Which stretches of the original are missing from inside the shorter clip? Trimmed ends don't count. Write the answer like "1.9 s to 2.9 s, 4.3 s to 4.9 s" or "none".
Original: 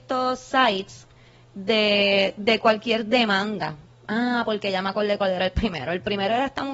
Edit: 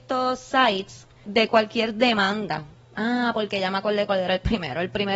1.2 s to 2.4 s